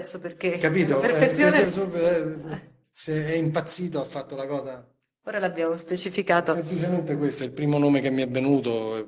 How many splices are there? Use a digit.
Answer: 1